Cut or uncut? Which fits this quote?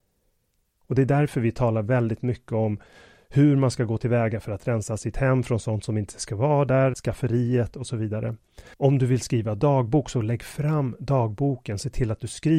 cut